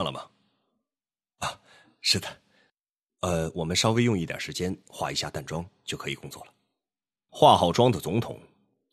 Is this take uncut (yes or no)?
no